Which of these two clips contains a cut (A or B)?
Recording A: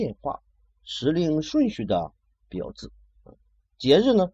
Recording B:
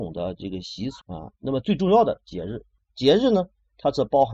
B